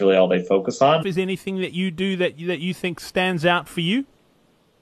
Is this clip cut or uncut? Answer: cut